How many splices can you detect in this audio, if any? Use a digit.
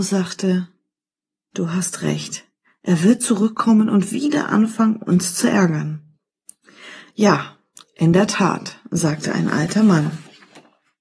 0